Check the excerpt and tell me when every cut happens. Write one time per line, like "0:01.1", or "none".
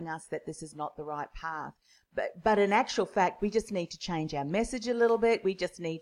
none